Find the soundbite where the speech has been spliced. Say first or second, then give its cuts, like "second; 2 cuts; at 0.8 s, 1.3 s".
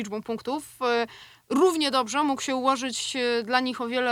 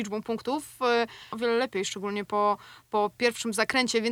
second; 1 cut; at 1.3 s